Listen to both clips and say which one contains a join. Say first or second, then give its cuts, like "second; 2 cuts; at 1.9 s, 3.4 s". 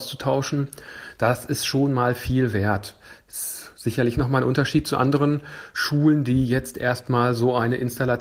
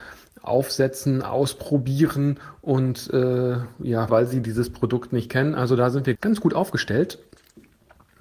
second; 2 cuts; at 4.1 s, 6.1 s